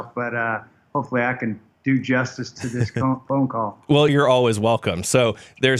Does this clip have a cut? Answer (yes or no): yes